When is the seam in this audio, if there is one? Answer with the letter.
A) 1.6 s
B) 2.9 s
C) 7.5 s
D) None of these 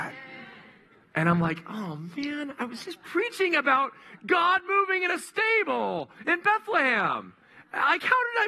D